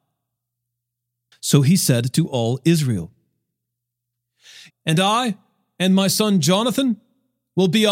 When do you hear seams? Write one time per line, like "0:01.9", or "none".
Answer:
0:01.3
0:04.7